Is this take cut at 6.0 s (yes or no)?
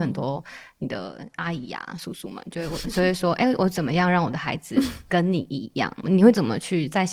yes